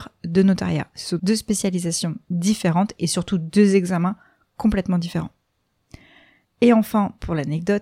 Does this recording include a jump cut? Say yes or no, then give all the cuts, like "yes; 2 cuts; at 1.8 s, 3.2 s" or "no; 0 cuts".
yes; 2 cuts; at 1.2 s, 6.4 s